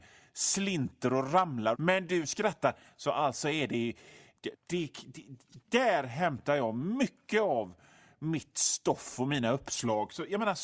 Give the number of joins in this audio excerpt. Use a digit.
2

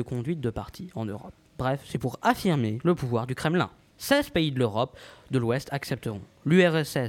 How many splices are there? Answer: 1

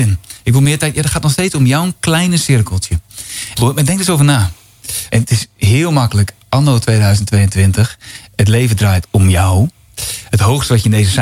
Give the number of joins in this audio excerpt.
2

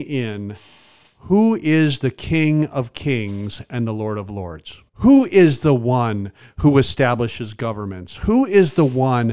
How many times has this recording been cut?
1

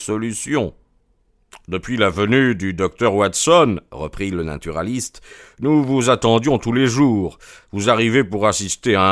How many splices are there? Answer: 0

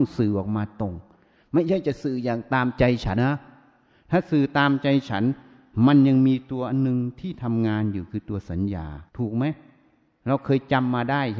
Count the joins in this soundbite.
2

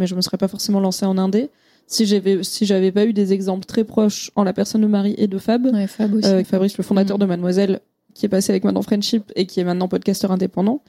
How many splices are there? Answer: 1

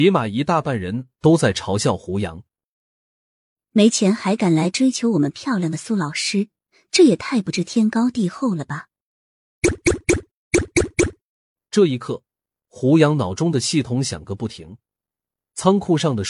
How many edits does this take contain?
0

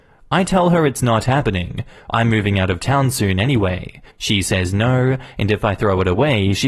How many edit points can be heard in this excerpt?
1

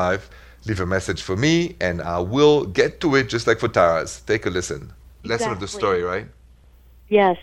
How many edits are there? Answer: 1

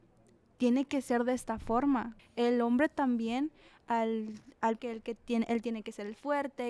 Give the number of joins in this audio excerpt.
2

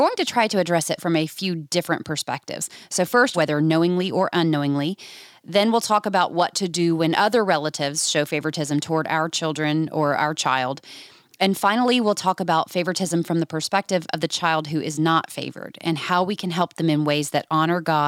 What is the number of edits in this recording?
1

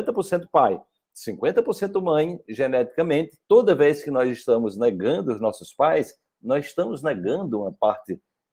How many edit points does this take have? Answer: 1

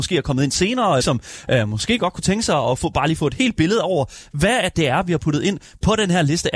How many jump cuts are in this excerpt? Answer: 1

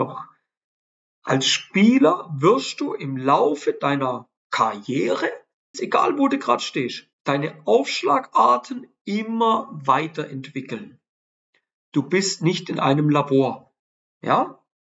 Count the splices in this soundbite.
3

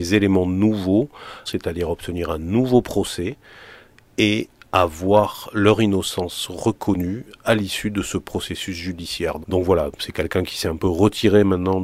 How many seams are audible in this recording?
2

